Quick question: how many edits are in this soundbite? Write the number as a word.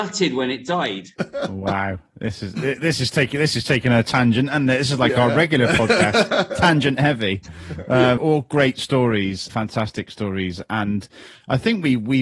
two